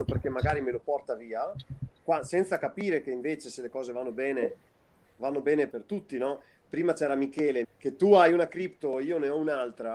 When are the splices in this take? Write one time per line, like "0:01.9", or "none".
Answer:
0:05.7
0:07.6